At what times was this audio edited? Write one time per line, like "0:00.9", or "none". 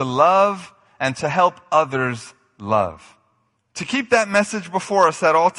0:03.6